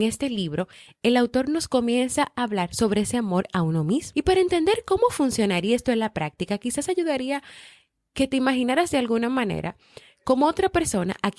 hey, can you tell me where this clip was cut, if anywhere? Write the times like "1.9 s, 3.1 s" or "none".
4.1 s